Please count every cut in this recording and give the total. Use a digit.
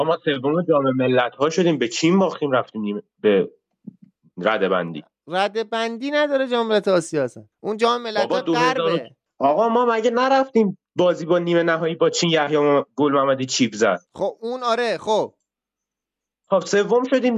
1